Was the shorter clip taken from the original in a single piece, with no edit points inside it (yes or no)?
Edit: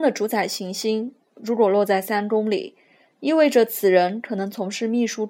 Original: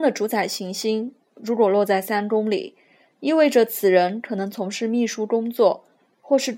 yes